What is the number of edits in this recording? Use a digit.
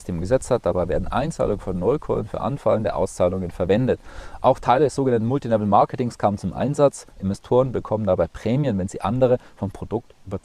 0